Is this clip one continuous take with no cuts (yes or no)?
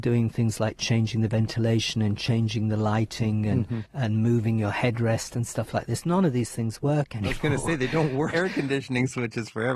no